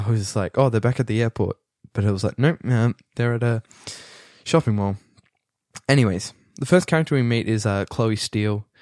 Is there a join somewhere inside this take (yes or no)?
no